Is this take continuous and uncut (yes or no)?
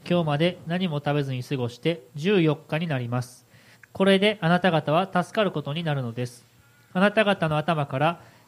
no